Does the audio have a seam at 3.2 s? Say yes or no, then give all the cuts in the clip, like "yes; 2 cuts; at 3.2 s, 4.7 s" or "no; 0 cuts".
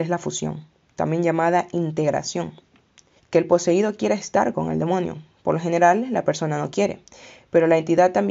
yes; 1 cut; at 3.2 s